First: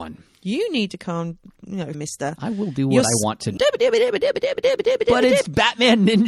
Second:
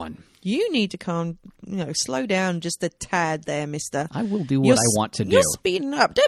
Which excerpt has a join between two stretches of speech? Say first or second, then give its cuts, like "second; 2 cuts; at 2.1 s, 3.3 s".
first; 2 cuts; at 1.9 s, 3.6 s